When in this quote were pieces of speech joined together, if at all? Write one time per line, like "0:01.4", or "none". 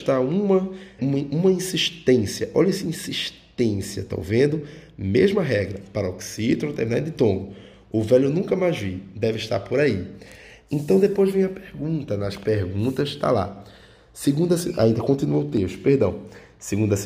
0:01.0